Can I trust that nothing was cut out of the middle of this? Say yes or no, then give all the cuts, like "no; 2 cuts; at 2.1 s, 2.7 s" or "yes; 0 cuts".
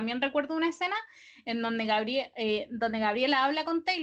yes; 0 cuts